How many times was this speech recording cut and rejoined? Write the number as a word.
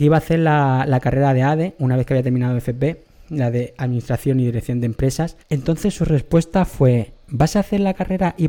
one